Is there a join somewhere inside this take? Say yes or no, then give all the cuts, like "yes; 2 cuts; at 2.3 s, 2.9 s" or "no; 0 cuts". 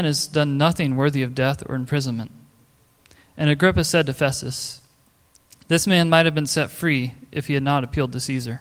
no; 0 cuts